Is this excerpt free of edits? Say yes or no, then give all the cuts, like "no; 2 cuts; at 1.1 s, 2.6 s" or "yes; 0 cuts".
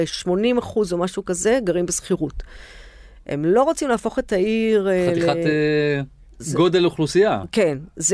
yes; 0 cuts